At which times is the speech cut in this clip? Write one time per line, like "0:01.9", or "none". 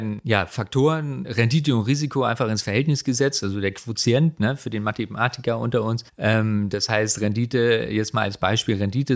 0:01.2
0:06.1